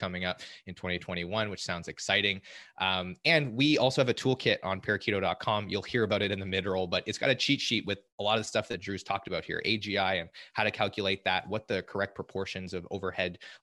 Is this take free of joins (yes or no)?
yes